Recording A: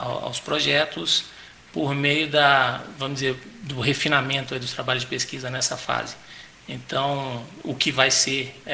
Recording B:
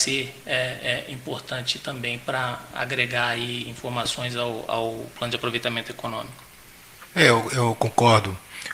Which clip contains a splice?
B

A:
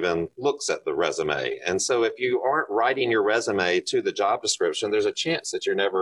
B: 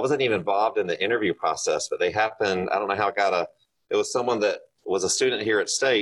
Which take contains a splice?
B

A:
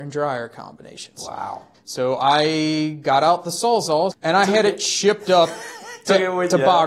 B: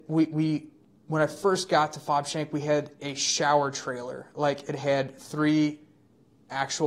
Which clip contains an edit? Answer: A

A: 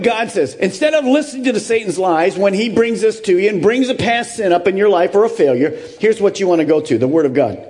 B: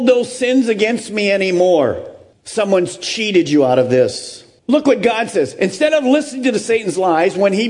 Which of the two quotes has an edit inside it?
B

